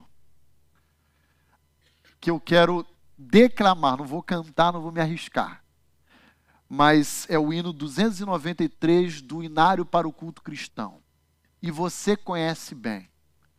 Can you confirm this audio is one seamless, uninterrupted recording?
yes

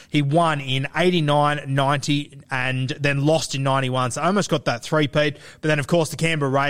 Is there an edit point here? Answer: no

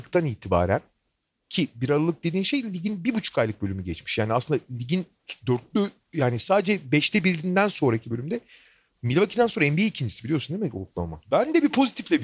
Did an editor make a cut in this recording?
yes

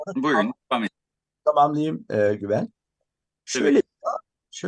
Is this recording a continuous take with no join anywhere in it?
yes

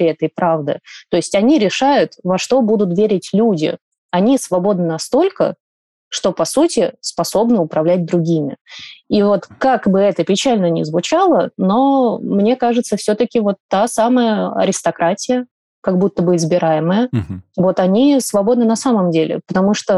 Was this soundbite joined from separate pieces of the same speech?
no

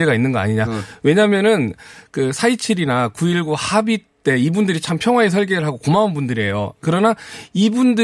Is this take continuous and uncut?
no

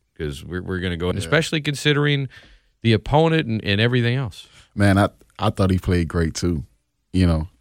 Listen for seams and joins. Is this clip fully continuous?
no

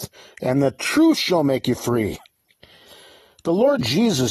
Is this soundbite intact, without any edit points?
yes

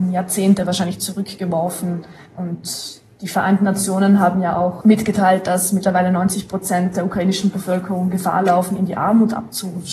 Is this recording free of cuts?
yes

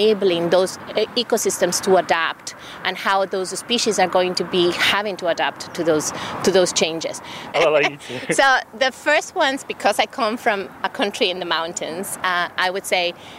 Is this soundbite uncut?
no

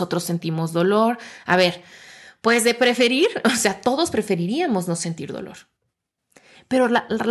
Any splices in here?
no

